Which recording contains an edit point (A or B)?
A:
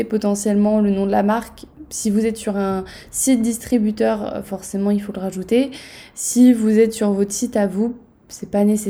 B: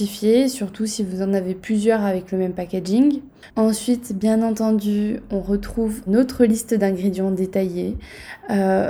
B